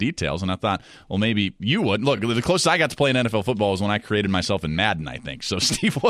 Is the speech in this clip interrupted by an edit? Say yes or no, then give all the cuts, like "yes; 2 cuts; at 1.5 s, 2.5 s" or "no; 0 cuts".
no; 0 cuts